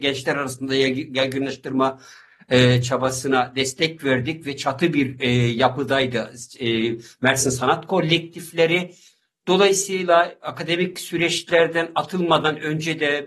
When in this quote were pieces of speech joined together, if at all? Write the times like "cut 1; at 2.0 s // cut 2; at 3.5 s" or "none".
none